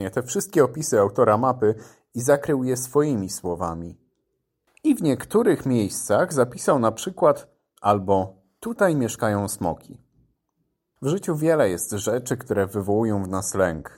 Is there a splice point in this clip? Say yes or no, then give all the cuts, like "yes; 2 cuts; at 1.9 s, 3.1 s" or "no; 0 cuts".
yes; 3 cuts; at 4.7 s, 7.8 s, 11.0 s